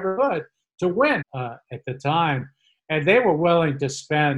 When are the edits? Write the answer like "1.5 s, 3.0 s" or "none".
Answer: 1.2 s